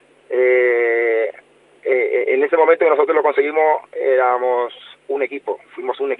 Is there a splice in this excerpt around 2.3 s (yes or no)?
no